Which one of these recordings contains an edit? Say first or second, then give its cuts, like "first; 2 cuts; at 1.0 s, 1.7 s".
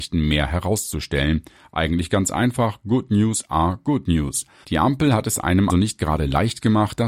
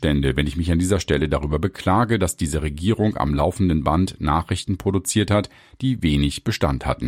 first; 2 cuts; at 4.6 s, 5.7 s